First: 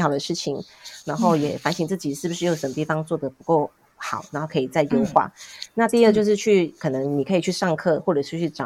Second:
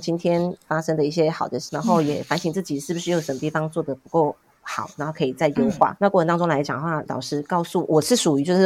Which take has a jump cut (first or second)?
second